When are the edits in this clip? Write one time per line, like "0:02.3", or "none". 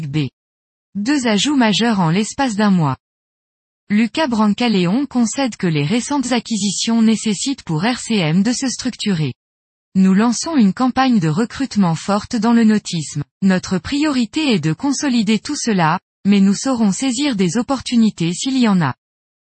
0:09.8
0:13.4